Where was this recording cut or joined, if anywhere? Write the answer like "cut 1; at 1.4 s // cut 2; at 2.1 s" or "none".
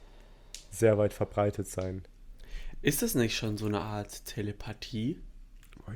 none